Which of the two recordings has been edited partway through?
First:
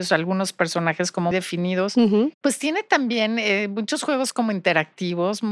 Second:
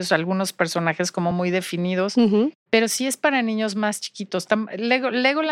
first; 2 cuts; at 1.3 s, 2.3 s

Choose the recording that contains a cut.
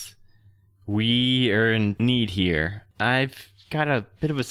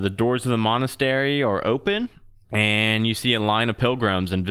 first; 1 cut; at 2.9 s

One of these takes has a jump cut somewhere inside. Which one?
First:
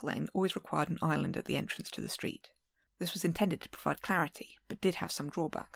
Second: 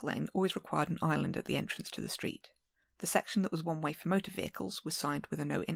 first; 1 cut; at 2.9 s

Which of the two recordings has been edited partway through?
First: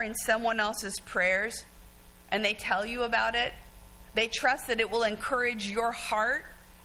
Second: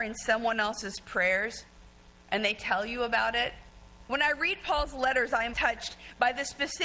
second; 2 cuts; at 4.0 s, 5.5 s

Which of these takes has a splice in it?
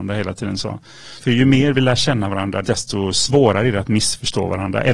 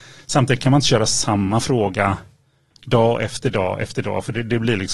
first; 2 cuts; at 1.2 s, 2.6 s

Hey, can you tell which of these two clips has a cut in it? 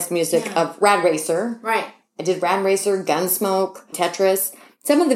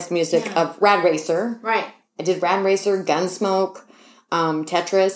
first; 1 cut; at 3.9 s

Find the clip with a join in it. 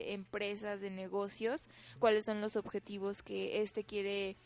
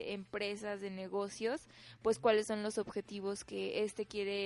first; 1 cut; at 2.0 s

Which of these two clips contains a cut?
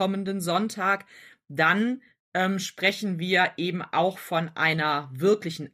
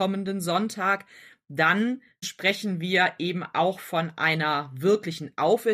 second; 1 cut; at 2.2 s

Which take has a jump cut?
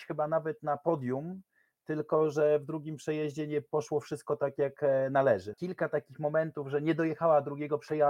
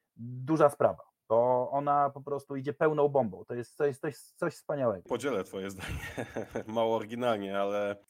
first; 1 cut; at 5.5 s

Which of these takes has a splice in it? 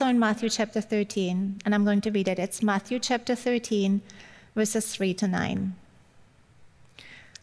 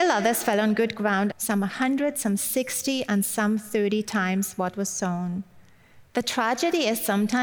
second; 2 cuts; at 1.3 s, 6.1 s

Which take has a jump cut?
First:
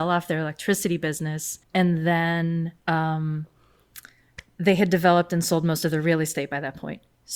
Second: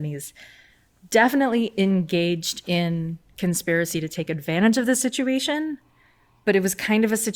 first; 2 cuts; at 1.6 s, 2.8 s

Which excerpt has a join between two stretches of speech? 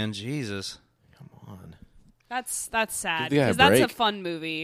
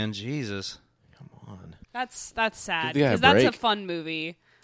second; 1 cut; at 1.8 s

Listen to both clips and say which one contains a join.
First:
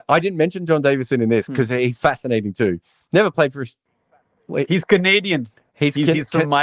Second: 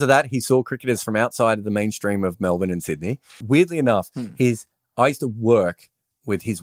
second; 1 cut; at 3.4 s

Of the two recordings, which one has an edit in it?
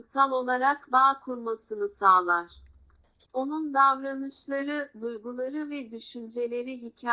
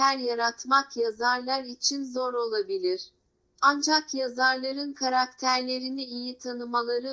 first; 1 cut; at 3.2 s

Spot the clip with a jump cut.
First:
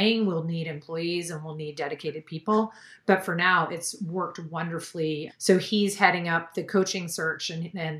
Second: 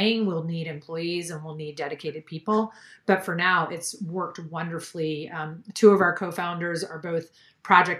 first; 1 cut; at 5.3 s

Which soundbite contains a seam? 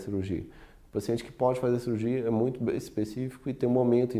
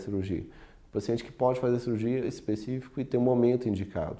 second; 1 cut; at 2.2 s

